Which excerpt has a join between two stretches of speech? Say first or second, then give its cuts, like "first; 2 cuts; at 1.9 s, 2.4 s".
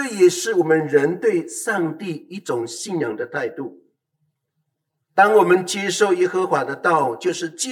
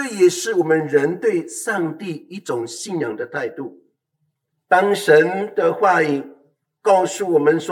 second; 1 cut; at 4.5 s